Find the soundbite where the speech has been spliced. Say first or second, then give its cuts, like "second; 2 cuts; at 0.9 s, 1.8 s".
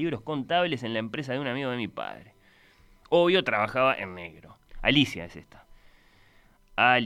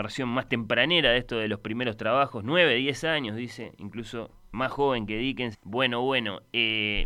second; 2 cuts; at 4.5 s, 5.5 s